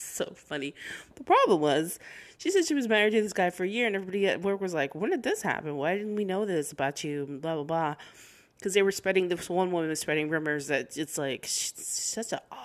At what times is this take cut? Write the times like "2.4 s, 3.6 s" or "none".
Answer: none